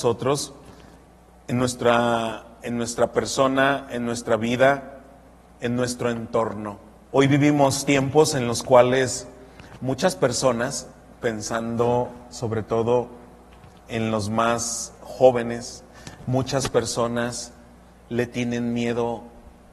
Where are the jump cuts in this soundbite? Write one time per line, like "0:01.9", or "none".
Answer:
0:07.1